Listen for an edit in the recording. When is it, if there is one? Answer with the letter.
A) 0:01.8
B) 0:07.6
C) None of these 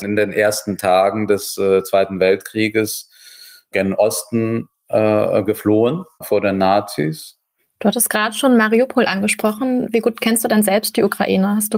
B